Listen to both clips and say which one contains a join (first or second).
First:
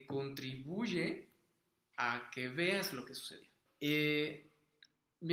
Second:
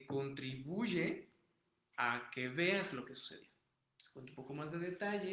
first